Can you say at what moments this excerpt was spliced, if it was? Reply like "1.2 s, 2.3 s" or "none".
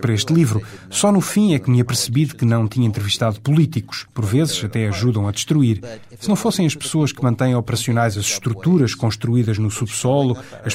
4.1 s